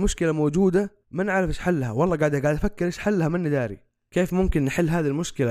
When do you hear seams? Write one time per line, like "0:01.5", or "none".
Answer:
0:01.0